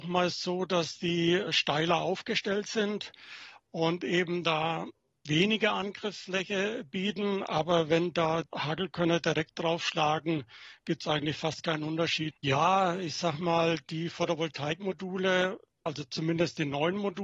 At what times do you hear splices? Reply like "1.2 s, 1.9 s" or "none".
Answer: 12.3 s, 15.9 s

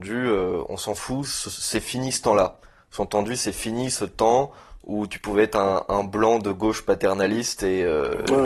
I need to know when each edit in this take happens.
none

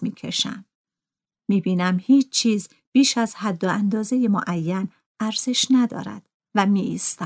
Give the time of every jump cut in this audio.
none

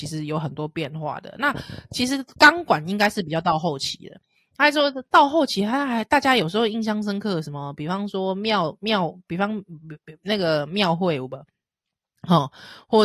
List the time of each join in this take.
none

